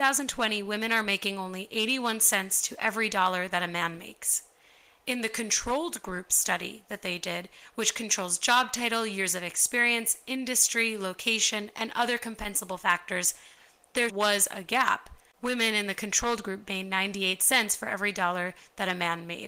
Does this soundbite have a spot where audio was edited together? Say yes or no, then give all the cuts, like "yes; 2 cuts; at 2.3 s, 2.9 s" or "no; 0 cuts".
yes; 1 cut; at 14.1 s